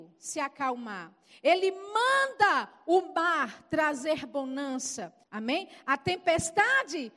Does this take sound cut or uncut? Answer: cut